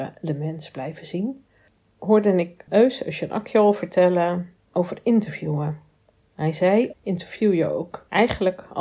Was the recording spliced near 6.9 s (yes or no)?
yes